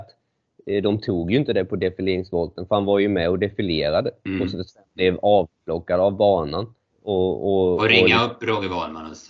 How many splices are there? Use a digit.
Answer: 1